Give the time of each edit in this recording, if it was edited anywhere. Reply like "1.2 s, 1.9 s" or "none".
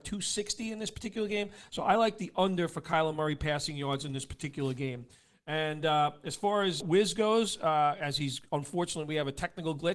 6.8 s